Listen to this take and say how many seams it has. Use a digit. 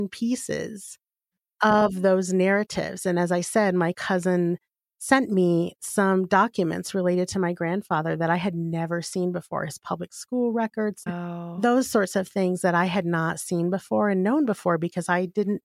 1